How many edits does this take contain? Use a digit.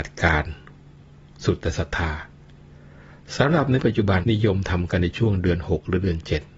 1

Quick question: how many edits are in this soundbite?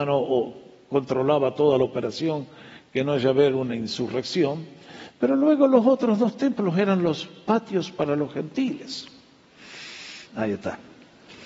1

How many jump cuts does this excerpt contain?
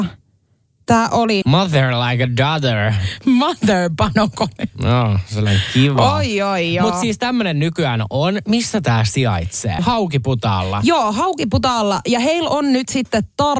2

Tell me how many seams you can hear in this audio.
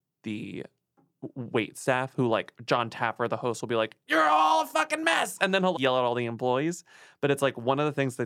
1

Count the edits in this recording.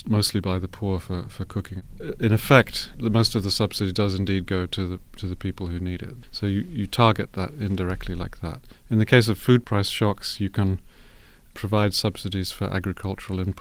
0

